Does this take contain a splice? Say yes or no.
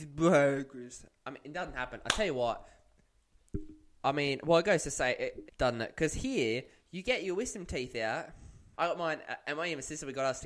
yes